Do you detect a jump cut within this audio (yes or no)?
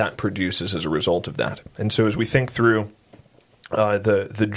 no